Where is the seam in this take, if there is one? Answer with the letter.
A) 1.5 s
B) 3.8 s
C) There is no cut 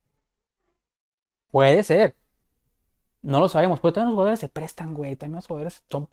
A